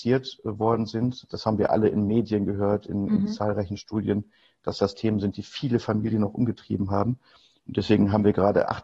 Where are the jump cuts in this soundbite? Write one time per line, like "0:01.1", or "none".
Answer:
none